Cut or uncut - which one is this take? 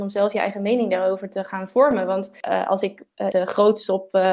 cut